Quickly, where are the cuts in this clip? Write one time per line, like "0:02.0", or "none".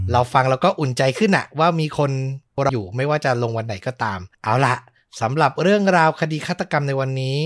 0:02.7
0:04.3